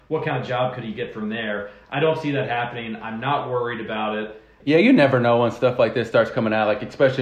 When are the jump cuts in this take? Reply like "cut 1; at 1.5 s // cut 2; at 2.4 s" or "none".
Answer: cut 1; at 4.6 s

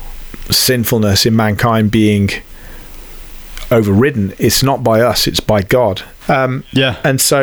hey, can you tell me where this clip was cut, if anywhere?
cut 1; at 6.2 s

